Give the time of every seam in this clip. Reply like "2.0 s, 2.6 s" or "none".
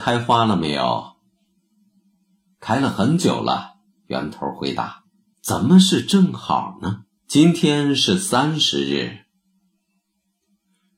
5.3 s, 7.2 s